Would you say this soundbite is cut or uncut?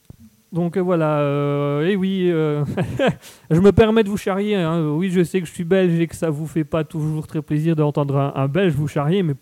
uncut